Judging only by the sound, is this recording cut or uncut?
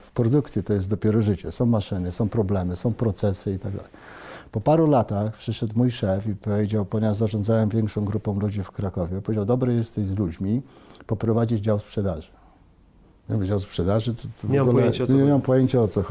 uncut